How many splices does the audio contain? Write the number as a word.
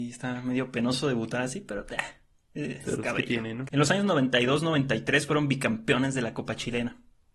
one